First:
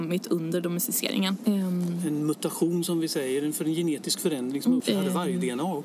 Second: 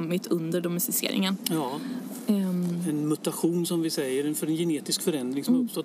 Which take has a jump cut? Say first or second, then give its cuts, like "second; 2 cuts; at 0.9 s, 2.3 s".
first; 2 cuts; at 1.4 s, 4.8 s